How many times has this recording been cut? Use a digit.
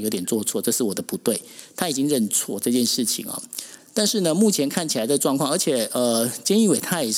1